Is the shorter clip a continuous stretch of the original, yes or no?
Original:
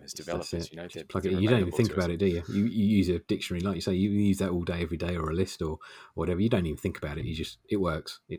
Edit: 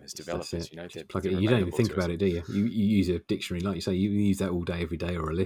yes